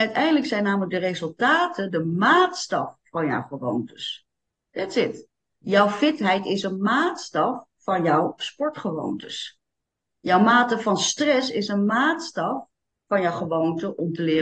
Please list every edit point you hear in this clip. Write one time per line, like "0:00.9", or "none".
0:05.5